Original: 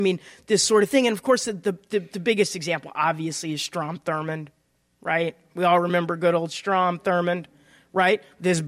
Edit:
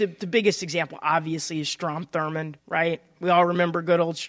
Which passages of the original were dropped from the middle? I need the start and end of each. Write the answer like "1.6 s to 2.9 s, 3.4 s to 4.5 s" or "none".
4.5 s to 4.9 s